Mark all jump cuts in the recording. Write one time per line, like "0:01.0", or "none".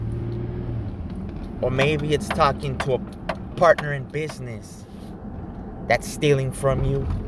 0:01.6